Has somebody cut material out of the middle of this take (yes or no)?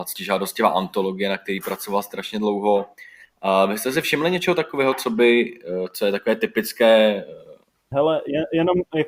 no